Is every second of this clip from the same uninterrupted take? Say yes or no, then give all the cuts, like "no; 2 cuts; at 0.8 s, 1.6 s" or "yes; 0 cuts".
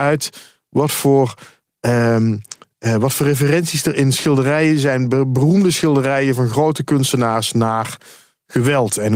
yes; 0 cuts